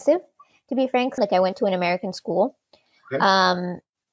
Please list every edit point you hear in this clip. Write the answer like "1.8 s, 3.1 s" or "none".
1.2 s